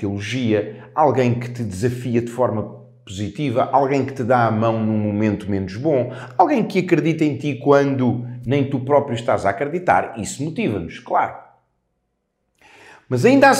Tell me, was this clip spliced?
no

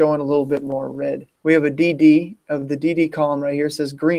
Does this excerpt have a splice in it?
yes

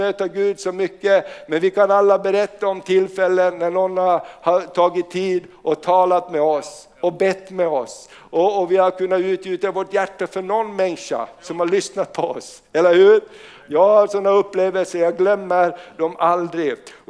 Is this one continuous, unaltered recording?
yes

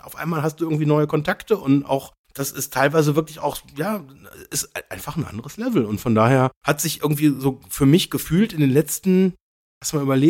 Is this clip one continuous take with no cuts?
yes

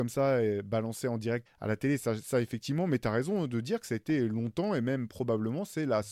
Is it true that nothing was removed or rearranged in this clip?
no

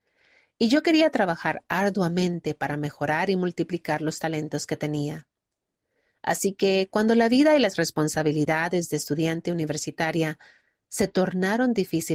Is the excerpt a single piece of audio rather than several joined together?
yes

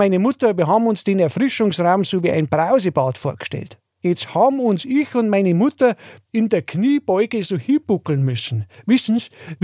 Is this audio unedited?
no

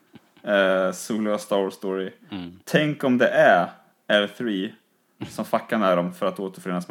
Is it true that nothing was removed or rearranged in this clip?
yes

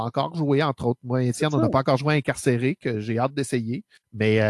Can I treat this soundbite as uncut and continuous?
yes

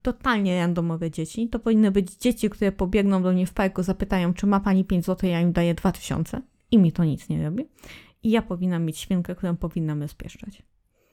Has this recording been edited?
no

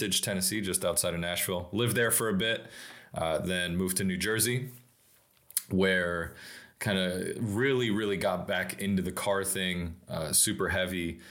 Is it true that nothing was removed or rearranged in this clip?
yes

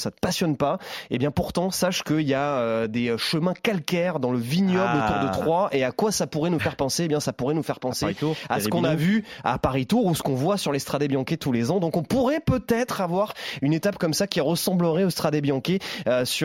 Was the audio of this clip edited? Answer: no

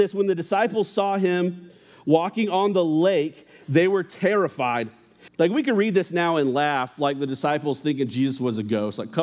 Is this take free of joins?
no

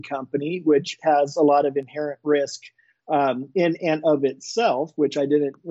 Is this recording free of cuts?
yes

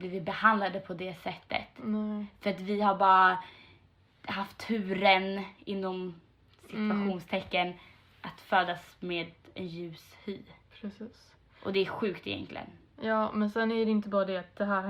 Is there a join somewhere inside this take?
no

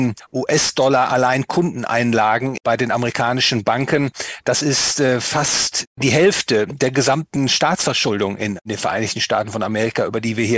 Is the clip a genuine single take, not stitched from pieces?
yes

